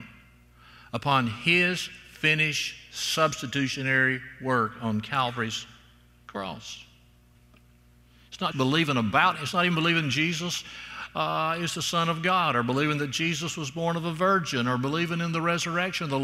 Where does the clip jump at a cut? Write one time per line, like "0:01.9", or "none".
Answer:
0:08.5